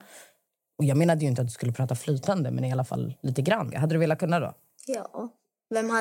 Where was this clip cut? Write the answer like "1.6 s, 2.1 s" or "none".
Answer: 3.7 s